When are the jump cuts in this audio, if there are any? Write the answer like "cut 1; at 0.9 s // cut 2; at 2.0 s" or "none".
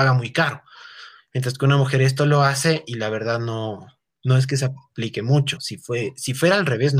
cut 1; at 5.6 s